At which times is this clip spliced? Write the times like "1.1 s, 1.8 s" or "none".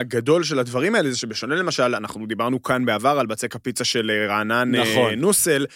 none